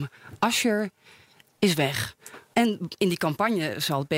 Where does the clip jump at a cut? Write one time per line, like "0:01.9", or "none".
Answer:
0:02.5